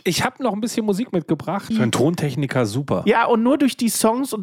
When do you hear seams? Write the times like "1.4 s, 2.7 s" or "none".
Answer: 1.7 s